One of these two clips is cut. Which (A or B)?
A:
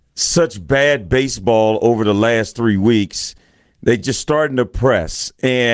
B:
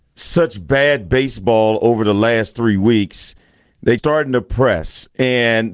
B